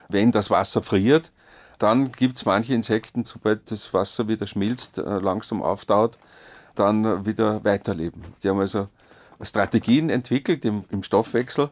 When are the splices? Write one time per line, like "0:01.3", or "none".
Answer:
0:03.2